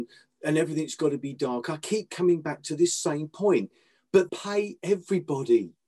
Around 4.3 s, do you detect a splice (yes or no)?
yes